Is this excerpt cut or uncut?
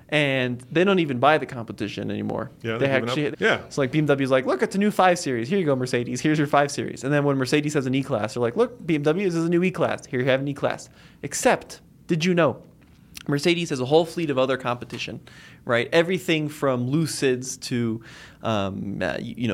cut